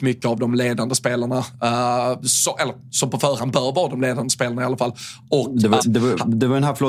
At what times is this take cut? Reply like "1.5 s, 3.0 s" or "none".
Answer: 5.8 s

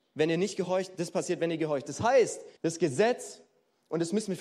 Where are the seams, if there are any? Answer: 2.6 s

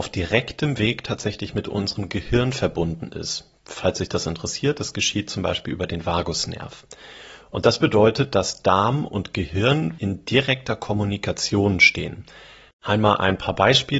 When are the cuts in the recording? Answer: 10.0 s, 12.7 s

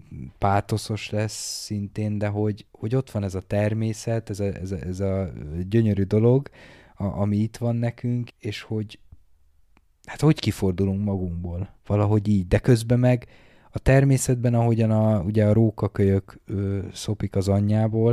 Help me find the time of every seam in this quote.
8.3 s, 11.8 s, 16.4 s

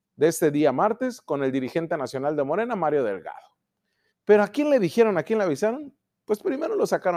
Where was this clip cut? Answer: 4.1 s

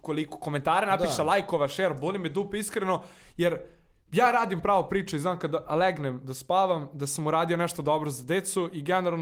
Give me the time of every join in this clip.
none

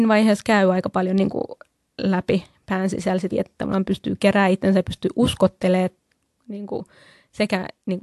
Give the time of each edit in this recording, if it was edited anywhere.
3.3 s

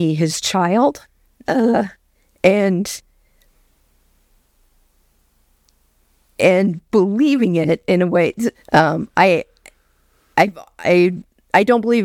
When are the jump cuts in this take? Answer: 8.5 s

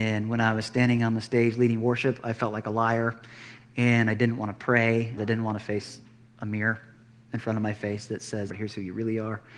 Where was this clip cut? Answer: 5.2 s, 8.5 s

